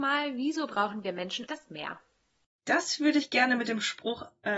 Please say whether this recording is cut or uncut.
cut